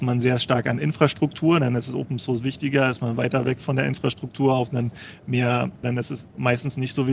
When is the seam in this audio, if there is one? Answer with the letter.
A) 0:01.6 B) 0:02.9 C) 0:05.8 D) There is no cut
C